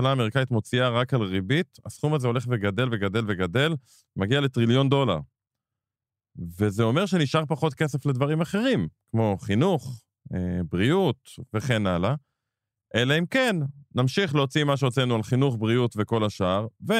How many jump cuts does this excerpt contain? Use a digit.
0